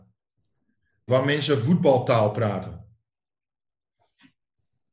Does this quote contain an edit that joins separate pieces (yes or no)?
yes